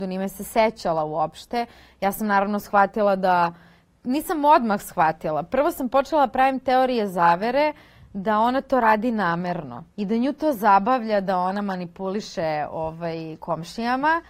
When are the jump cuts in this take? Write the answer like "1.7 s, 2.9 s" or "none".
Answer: 9.9 s